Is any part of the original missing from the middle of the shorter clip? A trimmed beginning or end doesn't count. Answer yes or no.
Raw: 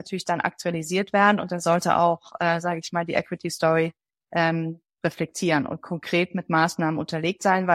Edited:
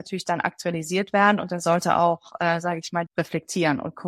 yes